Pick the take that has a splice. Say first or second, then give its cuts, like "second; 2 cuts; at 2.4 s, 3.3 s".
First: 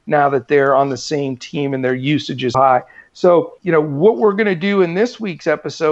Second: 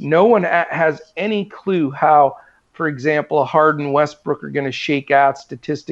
first; 2 cuts; at 2.5 s, 3.6 s